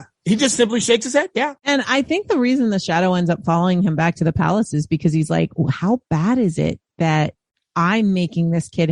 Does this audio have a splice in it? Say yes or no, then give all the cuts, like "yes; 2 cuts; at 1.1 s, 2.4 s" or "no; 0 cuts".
yes; 1 cut; at 1.6 s